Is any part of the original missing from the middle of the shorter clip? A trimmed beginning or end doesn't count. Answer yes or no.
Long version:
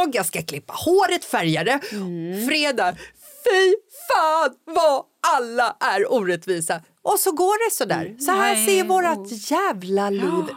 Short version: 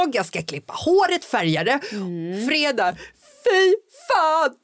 no